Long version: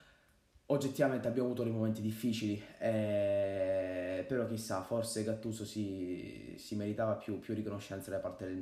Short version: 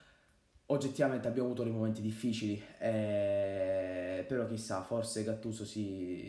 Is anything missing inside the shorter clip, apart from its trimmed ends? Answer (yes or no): no